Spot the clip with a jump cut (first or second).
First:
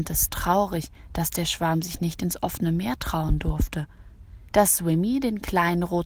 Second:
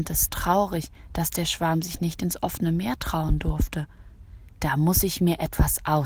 first